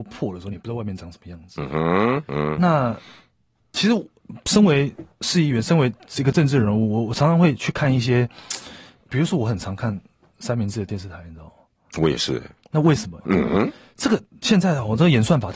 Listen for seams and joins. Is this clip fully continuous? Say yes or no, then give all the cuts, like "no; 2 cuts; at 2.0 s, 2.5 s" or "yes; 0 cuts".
no; 1 cut; at 13.2 s